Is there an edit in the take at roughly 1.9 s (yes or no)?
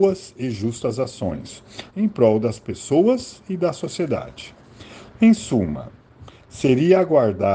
yes